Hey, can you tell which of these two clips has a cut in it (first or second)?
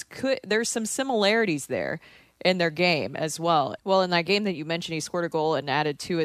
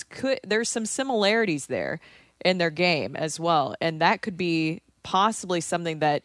first